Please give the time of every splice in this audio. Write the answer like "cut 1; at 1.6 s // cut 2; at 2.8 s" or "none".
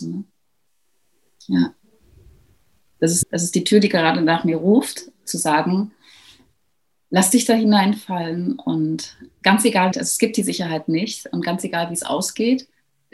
cut 1; at 3.2 s // cut 2; at 9.9 s